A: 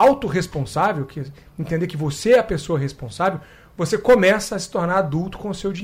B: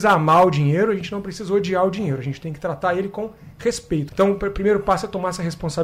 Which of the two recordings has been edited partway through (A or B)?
B